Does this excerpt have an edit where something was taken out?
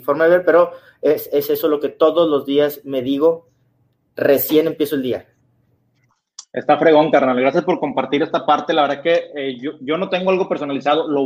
no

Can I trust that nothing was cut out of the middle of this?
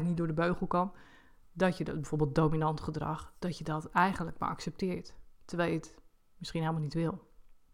yes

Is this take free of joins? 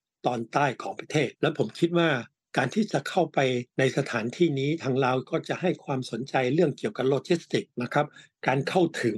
no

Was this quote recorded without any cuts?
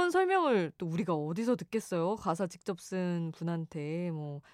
yes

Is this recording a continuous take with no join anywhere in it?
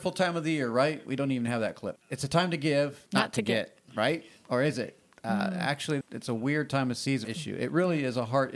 no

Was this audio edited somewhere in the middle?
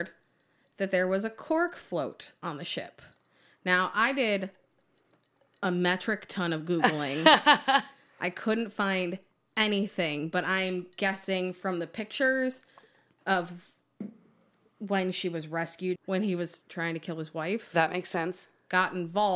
yes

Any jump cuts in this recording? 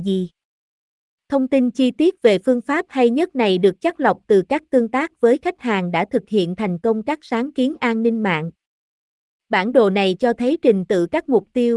no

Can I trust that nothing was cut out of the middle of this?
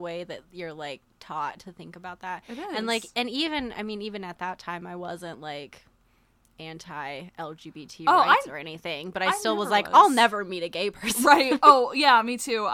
yes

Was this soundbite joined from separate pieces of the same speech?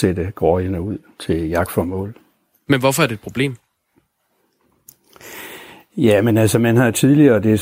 no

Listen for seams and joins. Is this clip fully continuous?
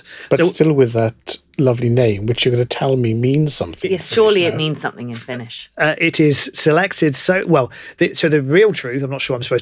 yes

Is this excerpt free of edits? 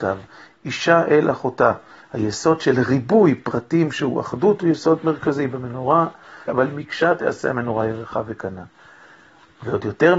no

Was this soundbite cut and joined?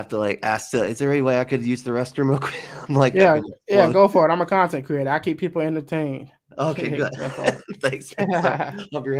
no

